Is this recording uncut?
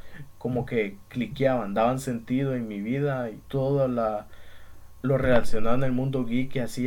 no; 2 cuts; at 3.4 s, 5.0 s

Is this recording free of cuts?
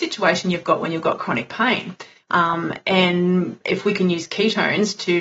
no; 1 cut; at 2.2 s

